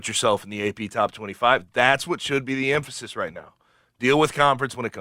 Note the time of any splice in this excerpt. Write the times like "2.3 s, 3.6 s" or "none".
none